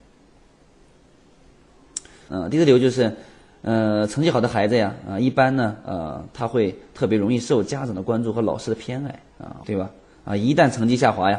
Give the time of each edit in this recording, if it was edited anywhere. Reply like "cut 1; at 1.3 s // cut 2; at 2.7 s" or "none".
cut 1; at 2.3 s // cut 2; at 9.6 s